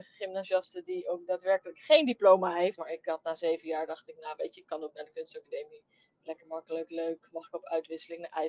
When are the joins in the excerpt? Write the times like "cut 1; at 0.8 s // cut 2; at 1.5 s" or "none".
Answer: cut 1; at 2.8 s